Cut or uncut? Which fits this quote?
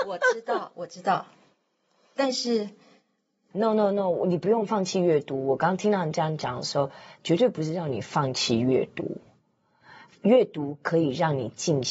cut